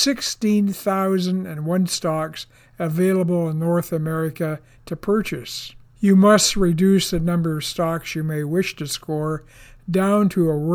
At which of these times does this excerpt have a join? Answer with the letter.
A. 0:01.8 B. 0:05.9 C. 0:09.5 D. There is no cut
B